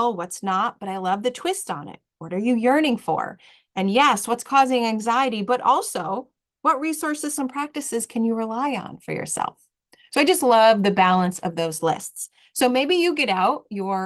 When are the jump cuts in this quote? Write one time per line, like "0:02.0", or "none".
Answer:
0:07.4